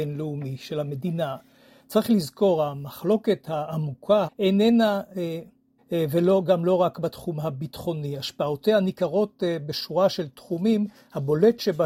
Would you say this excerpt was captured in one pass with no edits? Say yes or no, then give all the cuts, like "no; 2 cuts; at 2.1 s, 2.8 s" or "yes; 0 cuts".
no; 2 cuts; at 4.2 s, 5.8 s